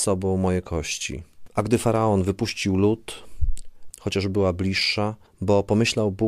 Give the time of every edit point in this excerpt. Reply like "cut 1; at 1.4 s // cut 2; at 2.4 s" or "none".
cut 1; at 1.5 s // cut 2; at 3.9 s

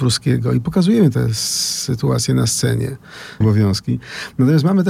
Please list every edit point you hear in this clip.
cut 1; at 3.4 s

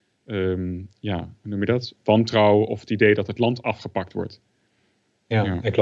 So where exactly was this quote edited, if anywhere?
none

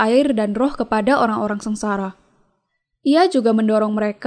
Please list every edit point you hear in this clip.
none

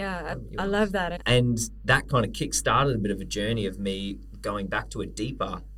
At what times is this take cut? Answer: cut 1; at 1.2 s

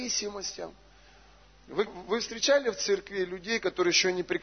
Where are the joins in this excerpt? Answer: cut 1; at 1.9 s

